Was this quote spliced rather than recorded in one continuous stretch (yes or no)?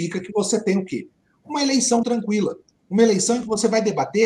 yes